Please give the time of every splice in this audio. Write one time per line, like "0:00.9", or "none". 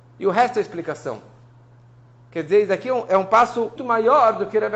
0:03.8